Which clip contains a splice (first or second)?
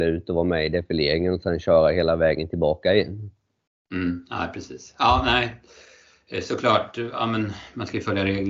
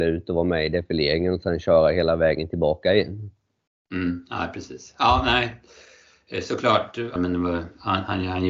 second